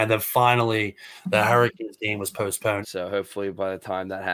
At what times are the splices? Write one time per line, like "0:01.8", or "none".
0:02.8